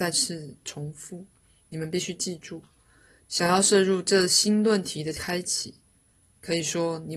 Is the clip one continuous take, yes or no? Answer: no